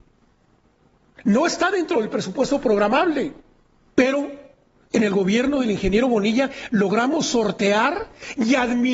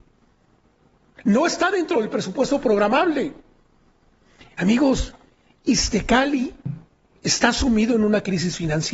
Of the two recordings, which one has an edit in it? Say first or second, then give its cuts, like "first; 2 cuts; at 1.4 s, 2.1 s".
first; 1 cut; at 3.9 s